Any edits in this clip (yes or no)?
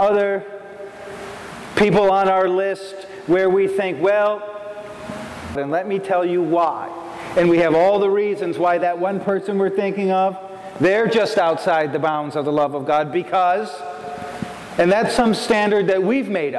yes